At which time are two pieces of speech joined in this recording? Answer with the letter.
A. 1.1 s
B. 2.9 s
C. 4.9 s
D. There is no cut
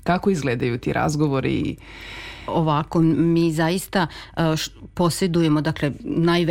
D